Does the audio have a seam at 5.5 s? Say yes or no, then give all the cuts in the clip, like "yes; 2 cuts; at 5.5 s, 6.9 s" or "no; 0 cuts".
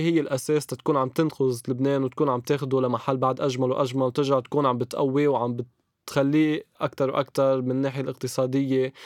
no; 1 cut; at 6.8 s